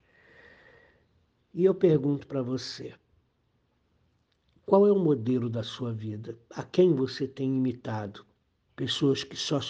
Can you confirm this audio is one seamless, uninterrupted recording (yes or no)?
no